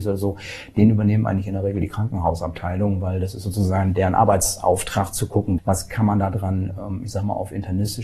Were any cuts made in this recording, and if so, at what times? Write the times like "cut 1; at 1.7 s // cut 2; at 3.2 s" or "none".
cut 1; at 5.6 s